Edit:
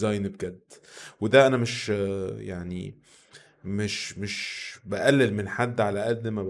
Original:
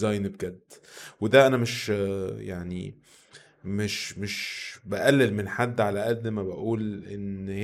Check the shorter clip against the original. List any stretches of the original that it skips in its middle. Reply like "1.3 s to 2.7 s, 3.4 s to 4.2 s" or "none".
none